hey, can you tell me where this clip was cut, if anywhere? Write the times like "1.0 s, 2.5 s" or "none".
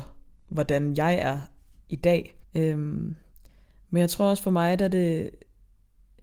2.4 s